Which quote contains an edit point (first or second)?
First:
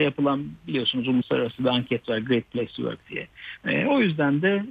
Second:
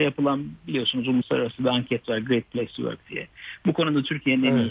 first